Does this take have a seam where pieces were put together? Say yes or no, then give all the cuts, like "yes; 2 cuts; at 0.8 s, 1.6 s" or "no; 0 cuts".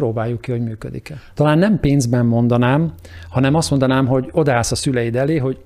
yes; 1 cut; at 1.3 s